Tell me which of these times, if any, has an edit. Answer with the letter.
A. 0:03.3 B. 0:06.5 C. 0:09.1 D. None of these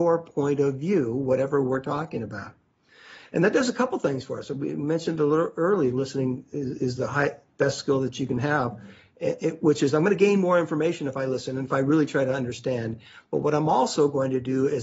D